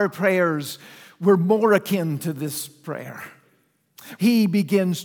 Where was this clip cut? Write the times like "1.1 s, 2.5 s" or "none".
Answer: 4.2 s